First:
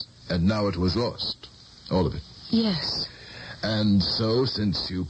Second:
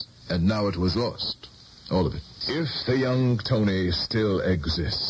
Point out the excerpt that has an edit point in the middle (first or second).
second